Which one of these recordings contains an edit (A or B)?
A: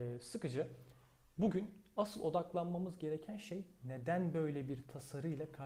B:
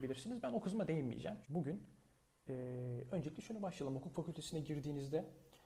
B